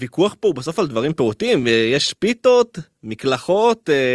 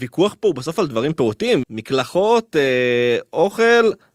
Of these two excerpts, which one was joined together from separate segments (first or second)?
second